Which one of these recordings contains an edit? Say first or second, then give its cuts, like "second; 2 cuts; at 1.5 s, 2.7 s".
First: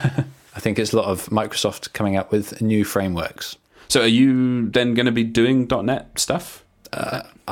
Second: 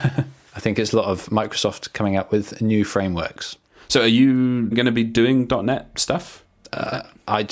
second; 1 cut; at 4.7 s